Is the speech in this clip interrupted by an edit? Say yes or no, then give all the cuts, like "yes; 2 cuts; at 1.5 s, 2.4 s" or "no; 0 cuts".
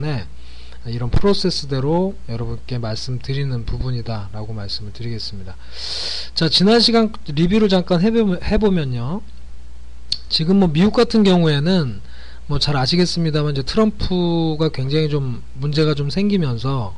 no; 0 cuts